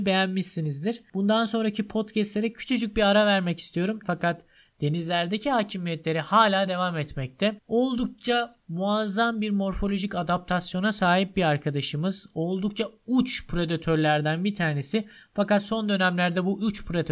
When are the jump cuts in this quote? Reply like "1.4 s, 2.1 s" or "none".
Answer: 4.0 s, 7.6 s